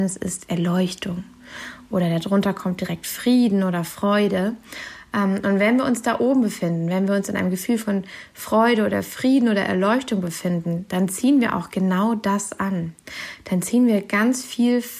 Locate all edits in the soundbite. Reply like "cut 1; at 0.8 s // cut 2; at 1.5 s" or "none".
none